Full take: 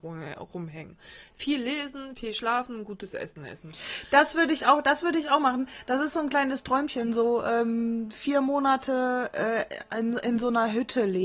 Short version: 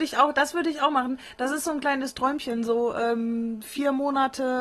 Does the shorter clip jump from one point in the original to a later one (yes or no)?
no